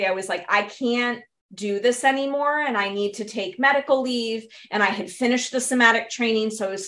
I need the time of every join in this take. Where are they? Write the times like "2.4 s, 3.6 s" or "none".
none